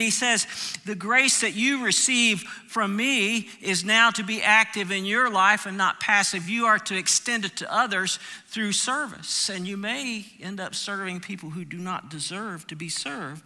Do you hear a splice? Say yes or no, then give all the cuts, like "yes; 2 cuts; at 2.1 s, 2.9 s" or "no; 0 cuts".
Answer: no; 0 cuts